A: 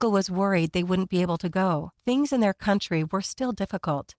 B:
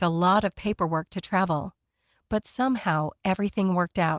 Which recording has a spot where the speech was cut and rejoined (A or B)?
A